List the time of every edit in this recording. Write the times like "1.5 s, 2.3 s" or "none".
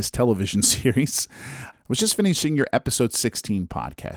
1.7 s